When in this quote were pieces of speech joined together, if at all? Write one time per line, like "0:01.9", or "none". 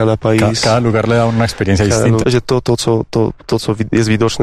0:02.2